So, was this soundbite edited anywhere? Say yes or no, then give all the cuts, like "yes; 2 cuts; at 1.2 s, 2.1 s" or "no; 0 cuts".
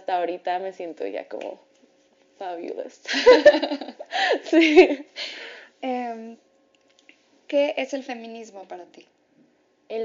no; 0 cuts